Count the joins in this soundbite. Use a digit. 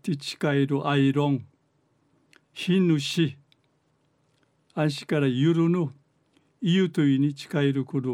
0